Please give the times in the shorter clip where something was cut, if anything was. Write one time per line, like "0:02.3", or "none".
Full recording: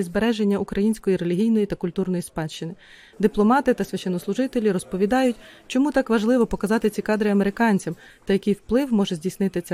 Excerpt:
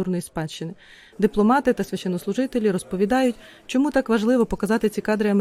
none

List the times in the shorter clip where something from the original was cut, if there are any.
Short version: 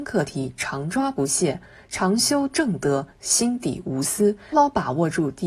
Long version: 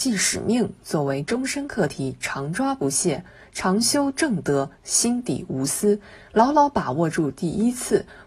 0:04.5

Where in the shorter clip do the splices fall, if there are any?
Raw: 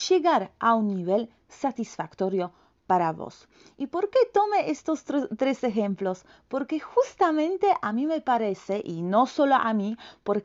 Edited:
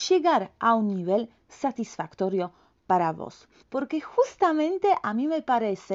0:03.6

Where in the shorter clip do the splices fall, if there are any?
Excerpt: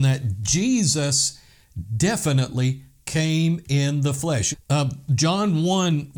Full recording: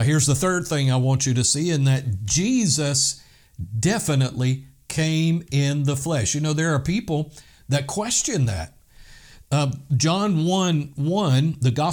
0:04.5

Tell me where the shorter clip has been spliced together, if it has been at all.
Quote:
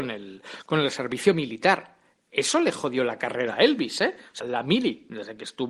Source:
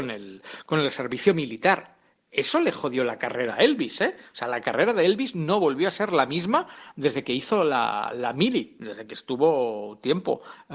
0:04.4

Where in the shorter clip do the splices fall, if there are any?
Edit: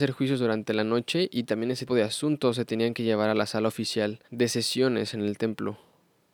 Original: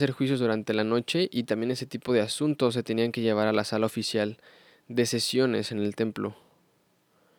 0:01.9
0:04.2

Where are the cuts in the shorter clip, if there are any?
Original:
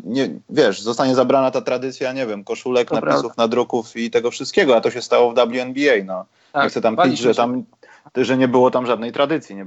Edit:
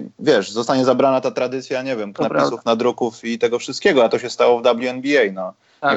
0:02.1

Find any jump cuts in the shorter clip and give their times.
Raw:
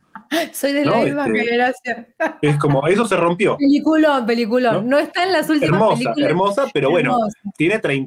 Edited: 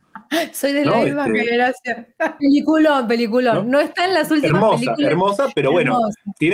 0:02.4

